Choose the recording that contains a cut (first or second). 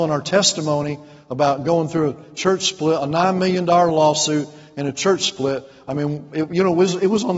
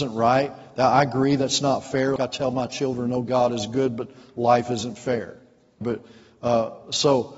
second